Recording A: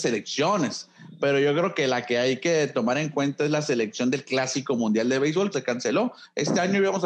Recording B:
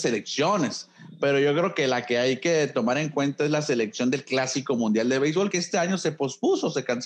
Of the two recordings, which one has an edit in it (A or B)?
A